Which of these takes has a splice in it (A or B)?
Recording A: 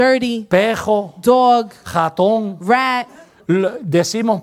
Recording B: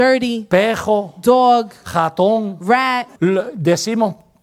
B